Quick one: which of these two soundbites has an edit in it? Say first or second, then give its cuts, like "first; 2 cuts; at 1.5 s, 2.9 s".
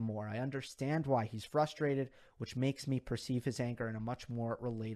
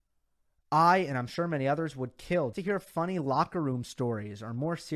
second; 1 cut; at 2.5 s